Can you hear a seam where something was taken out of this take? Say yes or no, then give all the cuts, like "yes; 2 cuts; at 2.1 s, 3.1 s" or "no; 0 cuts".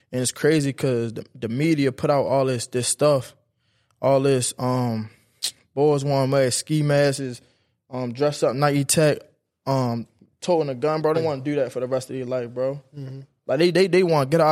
yes; 1 cut; at 11.1 s